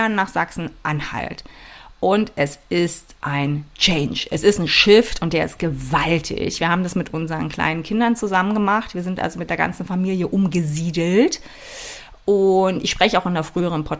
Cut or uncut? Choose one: uncut